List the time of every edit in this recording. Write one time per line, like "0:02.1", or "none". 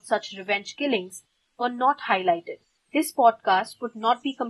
0:02.8